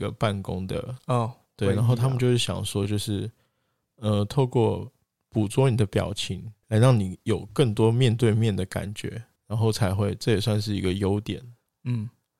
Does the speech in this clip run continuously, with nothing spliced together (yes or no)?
yes